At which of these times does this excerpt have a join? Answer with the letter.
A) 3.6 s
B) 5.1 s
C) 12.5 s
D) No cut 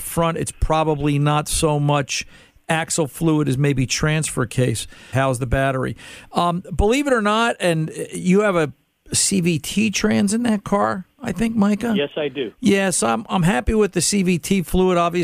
B